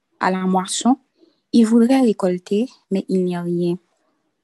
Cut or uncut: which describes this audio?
uncut